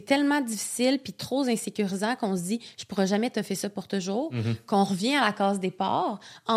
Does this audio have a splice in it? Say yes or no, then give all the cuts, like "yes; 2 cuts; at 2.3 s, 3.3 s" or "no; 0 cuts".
no; 0 cuts